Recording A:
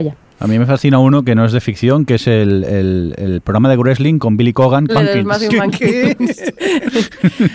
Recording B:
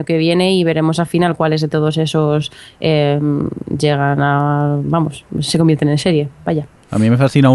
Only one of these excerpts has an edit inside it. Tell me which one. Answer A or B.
A